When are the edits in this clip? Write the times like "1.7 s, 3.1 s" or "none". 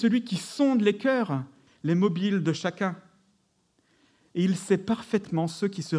1.7 s